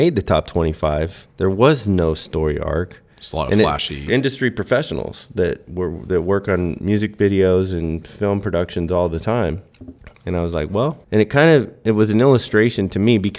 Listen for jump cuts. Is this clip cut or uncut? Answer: cut